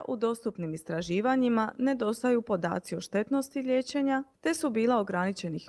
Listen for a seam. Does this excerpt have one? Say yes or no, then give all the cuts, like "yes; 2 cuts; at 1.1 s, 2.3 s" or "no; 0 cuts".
yes; 1 cut; at 4.3 s